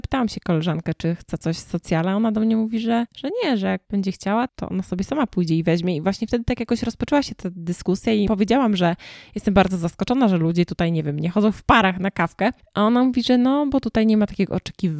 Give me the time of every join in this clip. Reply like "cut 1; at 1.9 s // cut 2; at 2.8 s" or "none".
cut 1; at 4.5 s